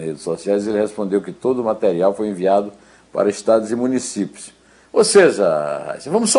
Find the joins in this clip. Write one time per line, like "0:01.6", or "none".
0:04.8

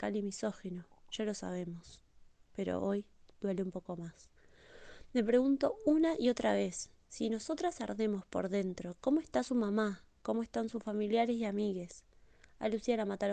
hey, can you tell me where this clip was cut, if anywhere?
none

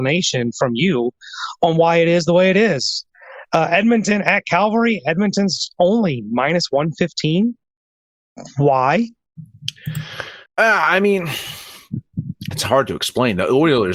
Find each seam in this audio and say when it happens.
0:10.5
0:12.5

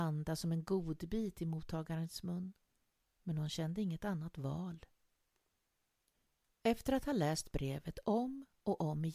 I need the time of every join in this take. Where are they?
none

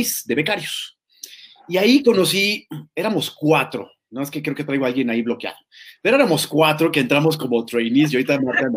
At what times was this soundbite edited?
none

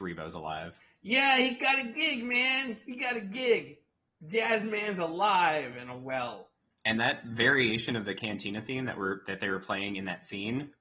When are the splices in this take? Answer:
none

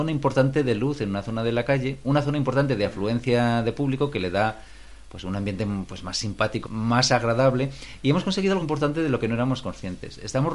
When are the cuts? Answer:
0:06.6
0:08.6

